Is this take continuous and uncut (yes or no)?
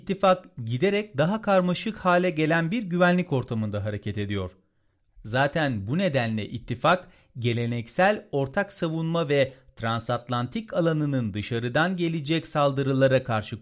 no